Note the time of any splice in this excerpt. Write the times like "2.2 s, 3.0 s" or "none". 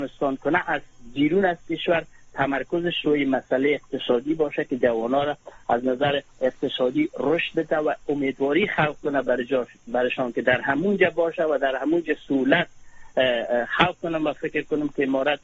6.3 s